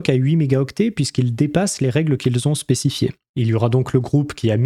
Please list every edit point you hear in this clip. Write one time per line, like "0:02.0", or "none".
0:03.3